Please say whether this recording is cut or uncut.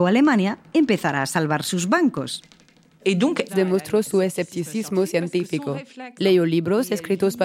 cut